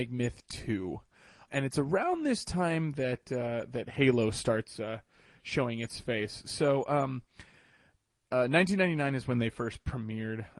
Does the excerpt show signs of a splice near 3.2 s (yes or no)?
no